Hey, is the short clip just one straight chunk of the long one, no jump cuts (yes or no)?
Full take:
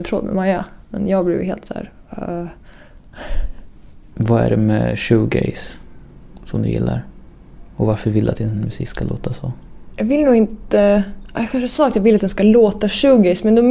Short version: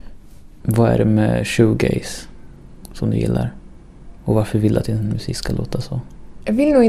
yes